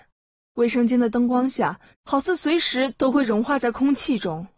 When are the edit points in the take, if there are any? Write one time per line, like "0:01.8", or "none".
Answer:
0:01.9